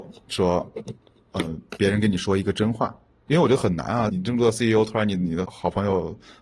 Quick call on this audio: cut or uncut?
cut